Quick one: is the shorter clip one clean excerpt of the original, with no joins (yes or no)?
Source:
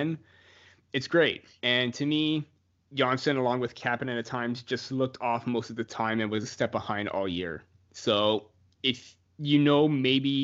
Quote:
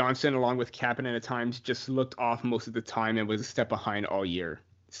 yes